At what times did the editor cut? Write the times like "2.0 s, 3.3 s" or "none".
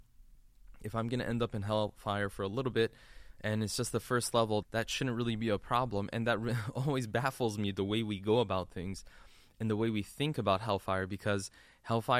4.6 s